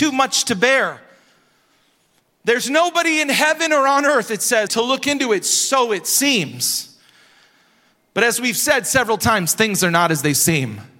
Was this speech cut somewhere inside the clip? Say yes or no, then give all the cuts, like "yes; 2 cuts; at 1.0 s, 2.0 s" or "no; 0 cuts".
yes; 1 cut; at 4.7 s